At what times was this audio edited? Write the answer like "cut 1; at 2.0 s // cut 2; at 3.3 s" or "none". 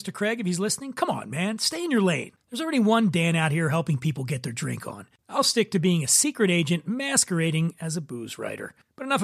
cut 1; at 5.2 s